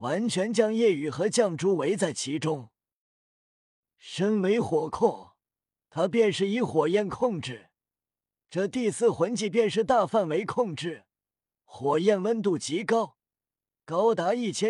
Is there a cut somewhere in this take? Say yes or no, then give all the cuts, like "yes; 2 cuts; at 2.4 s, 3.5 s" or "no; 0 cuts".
no; 0 cuts